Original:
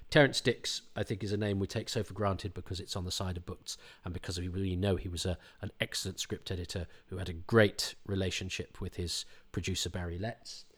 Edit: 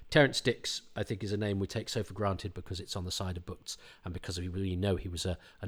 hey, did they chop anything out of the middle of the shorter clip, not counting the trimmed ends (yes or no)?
no